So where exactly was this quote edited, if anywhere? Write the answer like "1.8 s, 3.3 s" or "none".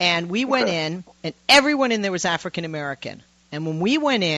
none